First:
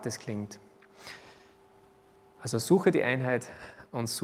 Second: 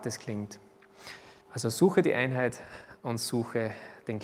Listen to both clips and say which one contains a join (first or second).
second